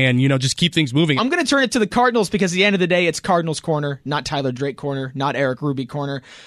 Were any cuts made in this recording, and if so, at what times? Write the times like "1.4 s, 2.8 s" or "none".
1.2 s